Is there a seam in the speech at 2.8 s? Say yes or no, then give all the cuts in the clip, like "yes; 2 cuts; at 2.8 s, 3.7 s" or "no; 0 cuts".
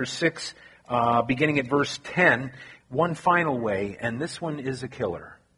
yes; 1 cut; at 2.8 s